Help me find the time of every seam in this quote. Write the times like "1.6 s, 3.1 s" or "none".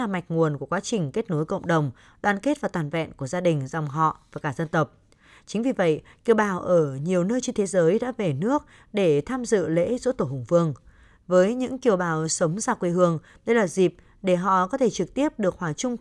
none